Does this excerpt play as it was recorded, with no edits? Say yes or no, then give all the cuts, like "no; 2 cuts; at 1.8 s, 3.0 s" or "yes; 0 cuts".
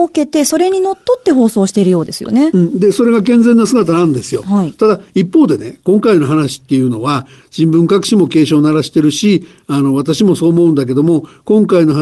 yes; 0 cuts